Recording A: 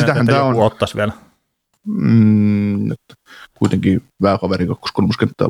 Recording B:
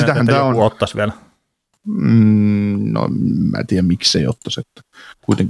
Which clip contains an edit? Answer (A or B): A